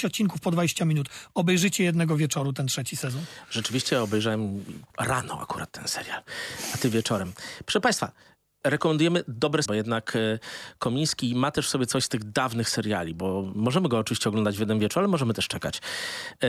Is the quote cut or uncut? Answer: cut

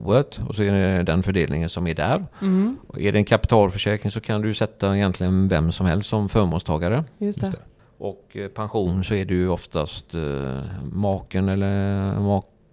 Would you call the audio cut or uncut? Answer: uncut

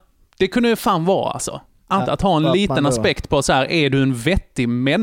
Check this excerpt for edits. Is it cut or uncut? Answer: cut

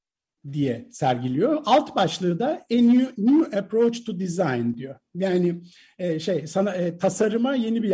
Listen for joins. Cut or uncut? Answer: uncut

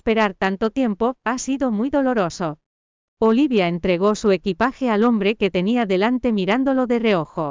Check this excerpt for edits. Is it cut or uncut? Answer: uncut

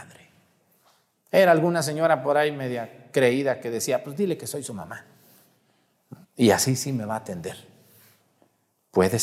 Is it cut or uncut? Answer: cut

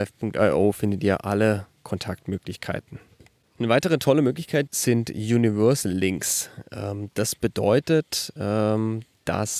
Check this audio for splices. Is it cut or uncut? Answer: cut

